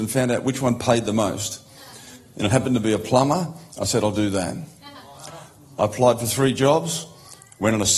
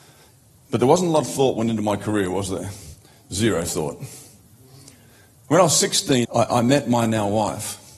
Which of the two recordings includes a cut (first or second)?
second